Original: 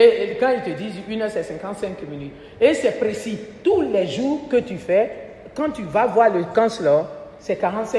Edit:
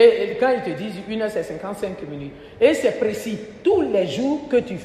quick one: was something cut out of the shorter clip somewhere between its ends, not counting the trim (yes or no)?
no